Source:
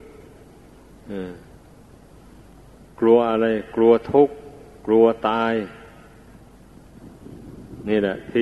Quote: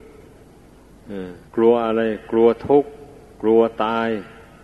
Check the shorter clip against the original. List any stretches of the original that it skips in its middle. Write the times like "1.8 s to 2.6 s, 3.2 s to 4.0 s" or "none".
1.5 s to 2.9 s